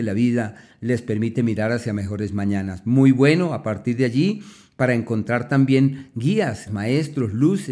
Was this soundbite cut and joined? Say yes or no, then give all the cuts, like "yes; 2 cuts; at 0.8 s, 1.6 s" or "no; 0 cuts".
yes; 1 cut; at 6.7 s